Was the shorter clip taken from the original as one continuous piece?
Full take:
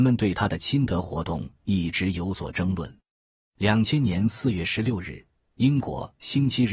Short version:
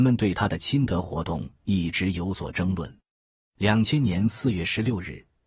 yes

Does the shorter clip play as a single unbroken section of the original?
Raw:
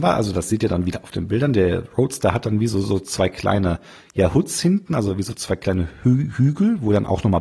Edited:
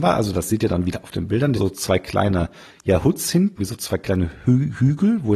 no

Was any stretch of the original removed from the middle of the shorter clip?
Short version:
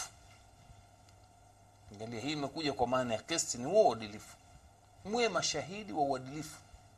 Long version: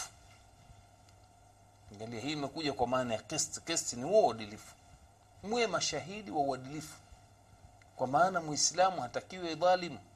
yes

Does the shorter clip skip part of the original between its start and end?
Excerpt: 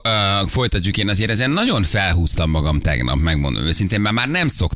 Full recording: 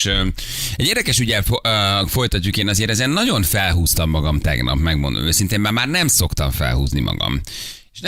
no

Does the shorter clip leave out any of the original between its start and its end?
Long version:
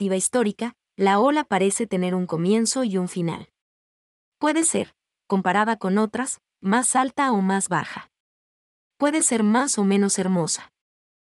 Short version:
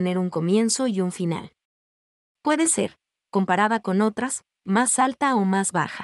no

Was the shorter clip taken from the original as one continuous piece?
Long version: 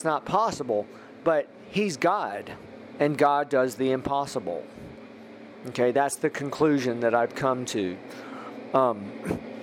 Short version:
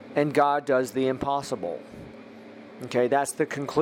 yes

